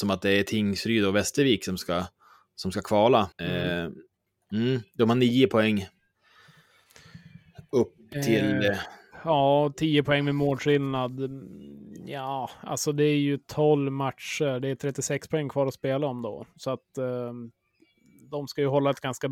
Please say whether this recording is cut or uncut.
cut